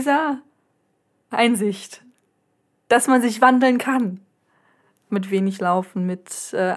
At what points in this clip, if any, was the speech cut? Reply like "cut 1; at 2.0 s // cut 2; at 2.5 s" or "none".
cut 1; at 5.1 s